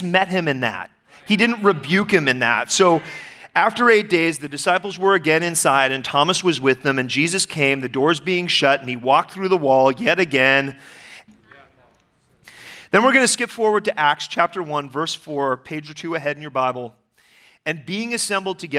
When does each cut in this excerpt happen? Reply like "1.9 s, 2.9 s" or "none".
11.3 s

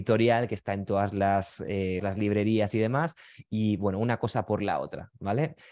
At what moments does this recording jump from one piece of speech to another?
2.0 s

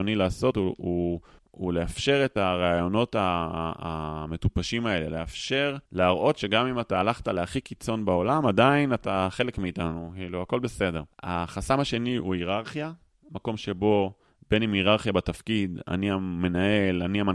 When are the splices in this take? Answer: 5.9 s, 11.1 s

